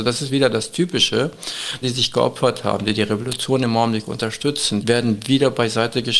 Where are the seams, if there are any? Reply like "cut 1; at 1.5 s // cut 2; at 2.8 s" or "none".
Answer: cut 1; at 1.8 s // cut 2; at 4.8 s